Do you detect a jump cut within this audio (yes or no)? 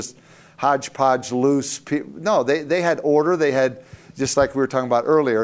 no